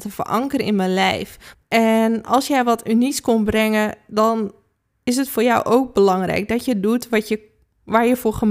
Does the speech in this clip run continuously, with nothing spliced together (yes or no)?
no